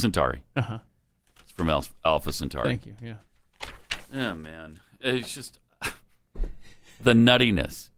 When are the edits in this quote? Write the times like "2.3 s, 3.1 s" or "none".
none